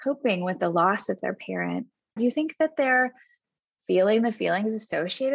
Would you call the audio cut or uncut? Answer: cut